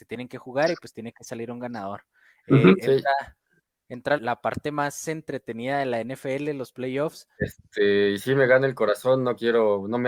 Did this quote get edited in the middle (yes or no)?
yes